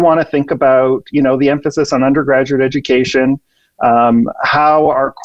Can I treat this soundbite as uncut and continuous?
yes; 0 cuts

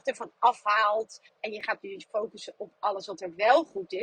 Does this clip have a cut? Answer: yes; 1 cut; at 1.3 s

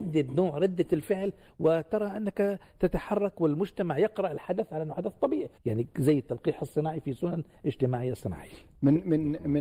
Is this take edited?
yes; 1 cut; at 5.6 s

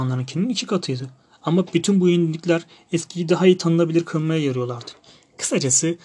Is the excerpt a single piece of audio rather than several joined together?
yes; 0 cuts

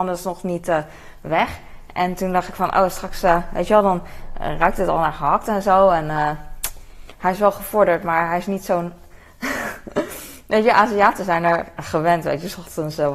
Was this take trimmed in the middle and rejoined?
no; 0 cuts

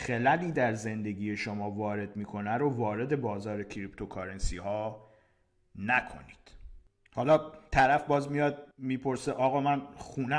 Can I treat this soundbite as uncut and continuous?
no; 1 cut; at 8.7 s

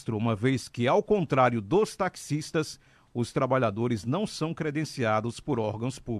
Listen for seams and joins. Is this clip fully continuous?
yes; 0 cuts

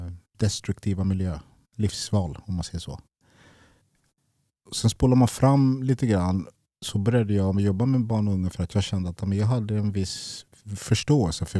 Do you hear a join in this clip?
no; 0 cuts

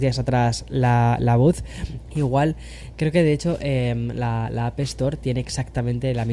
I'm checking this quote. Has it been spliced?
yes; 1 cut; at 2.1 s

